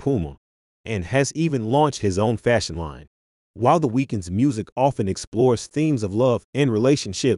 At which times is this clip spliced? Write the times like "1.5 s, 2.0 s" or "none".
3.4 s